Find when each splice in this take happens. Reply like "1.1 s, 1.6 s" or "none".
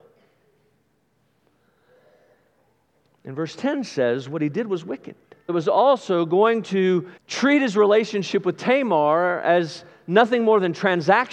5.5 s, 7.2 s